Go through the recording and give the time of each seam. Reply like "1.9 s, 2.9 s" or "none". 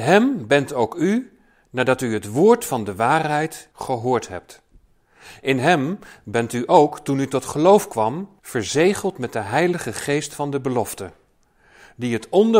3.7 s, 8.4 s